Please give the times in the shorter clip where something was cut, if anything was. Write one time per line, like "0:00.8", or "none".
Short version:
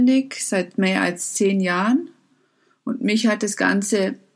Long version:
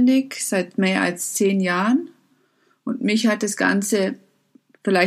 none